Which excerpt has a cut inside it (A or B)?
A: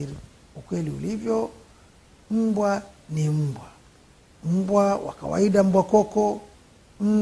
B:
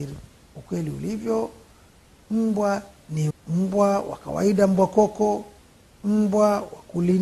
B